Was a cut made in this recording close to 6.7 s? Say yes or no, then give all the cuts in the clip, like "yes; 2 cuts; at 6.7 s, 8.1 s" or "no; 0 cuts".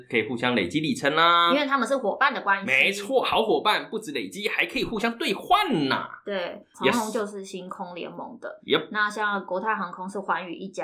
yes; 1 cut; at 6.7 s